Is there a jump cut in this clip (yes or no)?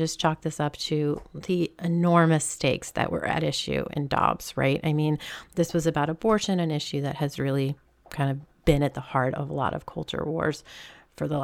no